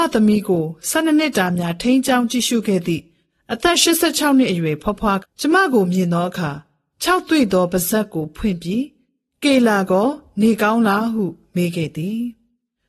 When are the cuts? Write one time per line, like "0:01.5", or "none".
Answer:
0:05.2